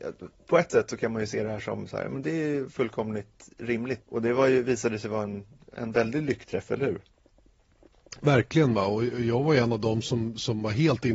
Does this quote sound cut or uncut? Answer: cut